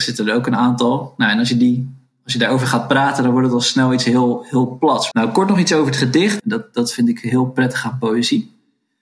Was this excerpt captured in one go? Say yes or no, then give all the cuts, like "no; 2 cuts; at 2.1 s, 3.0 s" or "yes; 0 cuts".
no; 2 cuts; at 5.1 s, 6.4 s